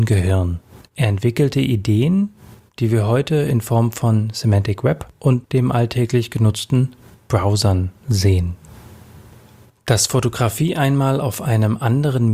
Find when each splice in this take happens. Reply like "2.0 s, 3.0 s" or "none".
none

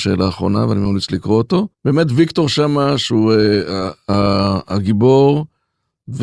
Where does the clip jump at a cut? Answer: 1.7 s

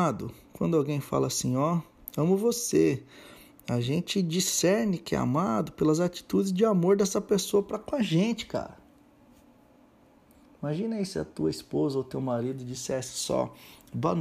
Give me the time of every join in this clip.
none

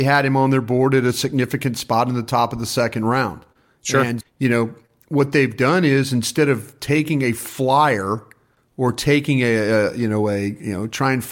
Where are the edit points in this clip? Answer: 4.2 s

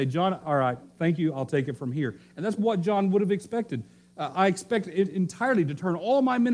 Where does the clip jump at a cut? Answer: 2.6 s

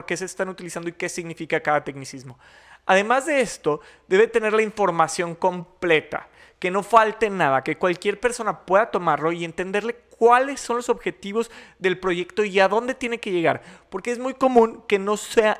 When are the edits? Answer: none

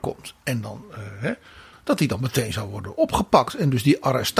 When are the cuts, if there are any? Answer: 1.7 s

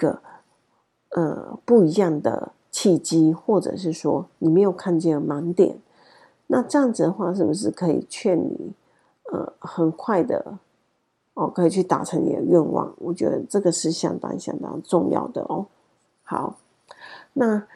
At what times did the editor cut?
none

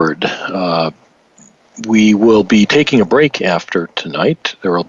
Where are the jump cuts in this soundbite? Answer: none

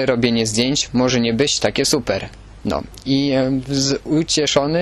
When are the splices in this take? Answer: 2.6 s

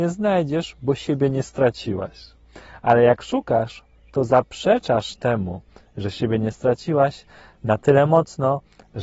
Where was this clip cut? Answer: none

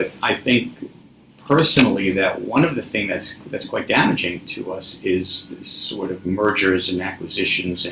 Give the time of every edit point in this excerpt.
none

